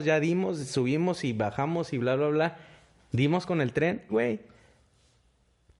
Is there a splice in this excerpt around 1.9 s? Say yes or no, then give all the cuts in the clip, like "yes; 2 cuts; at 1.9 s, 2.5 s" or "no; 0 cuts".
no; 1 cut; at 4.1 s